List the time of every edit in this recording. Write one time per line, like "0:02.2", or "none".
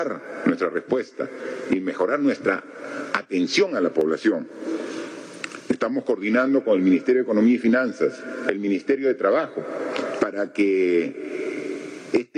0:05.7
0:10.2